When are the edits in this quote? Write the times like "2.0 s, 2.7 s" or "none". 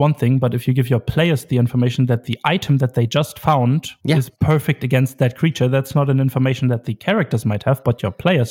none